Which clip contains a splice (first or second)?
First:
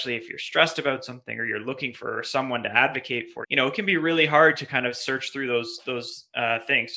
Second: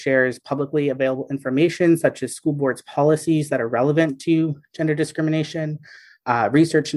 first